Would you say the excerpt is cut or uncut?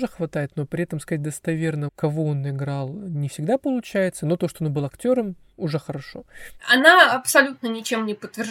cut